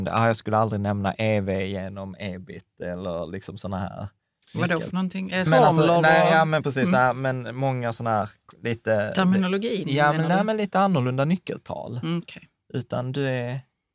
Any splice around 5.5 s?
yes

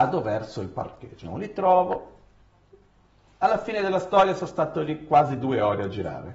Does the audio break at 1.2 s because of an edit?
yes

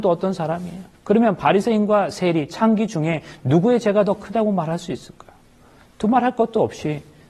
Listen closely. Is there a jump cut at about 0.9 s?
yes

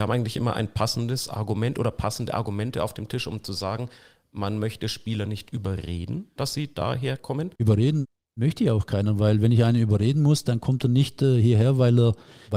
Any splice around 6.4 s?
yes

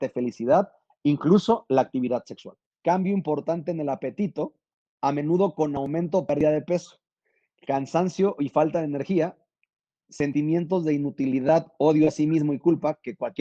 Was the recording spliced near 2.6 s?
yes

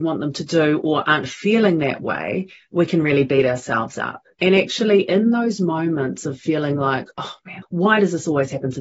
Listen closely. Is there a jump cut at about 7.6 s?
yes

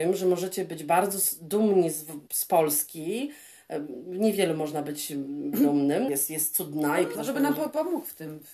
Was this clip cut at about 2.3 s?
yes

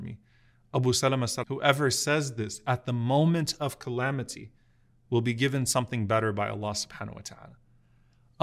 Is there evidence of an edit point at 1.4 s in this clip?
yes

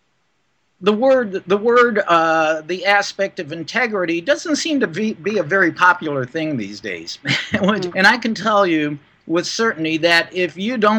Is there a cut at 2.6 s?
no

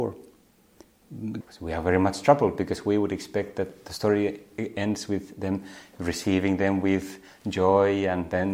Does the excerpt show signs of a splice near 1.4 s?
yes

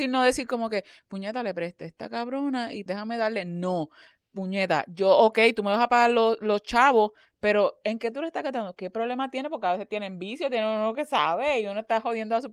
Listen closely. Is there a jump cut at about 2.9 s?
yes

